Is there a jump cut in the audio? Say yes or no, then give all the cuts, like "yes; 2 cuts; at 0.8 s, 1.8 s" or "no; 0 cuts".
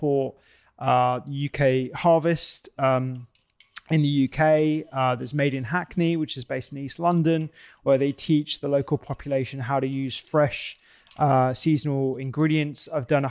no; 0 cuts